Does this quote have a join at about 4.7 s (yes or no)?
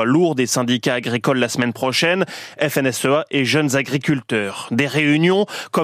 no